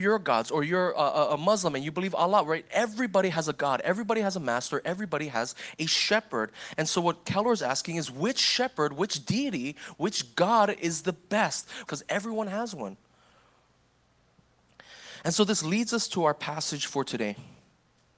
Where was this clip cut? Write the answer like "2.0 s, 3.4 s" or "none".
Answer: 11.9 s